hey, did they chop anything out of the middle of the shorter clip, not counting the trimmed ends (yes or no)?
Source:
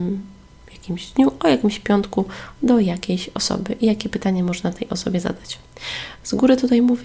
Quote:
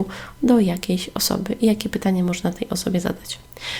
no